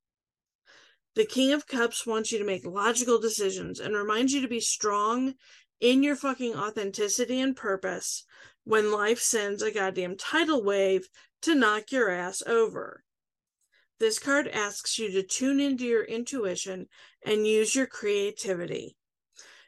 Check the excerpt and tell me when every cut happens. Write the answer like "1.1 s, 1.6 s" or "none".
none